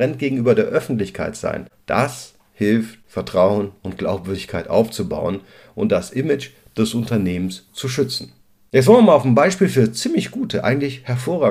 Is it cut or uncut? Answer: uncut